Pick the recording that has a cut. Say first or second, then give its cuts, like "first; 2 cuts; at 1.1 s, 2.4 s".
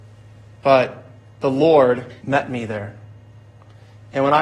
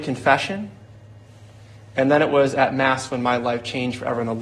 first; 1 cut; at 2.2 s